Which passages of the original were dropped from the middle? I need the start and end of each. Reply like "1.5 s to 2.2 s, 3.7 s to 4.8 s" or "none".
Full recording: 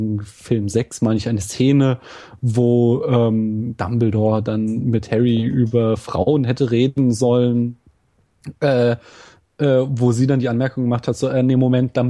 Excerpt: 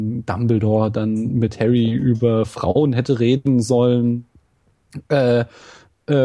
none